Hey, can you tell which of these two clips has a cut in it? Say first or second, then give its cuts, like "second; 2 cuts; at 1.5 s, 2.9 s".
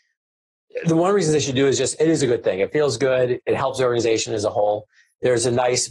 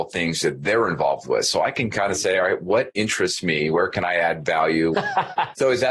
second; 1 cut; at 4.9 s